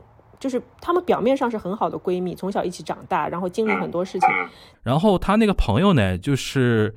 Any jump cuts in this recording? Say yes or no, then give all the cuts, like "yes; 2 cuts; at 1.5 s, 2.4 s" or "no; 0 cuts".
yes; 1 cut; at 4.7 s